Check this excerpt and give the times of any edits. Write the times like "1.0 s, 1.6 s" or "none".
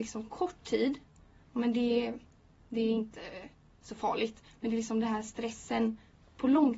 none